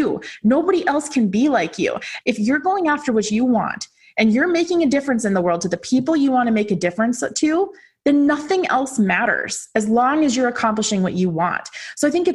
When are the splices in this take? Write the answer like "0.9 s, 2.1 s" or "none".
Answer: 2.2 s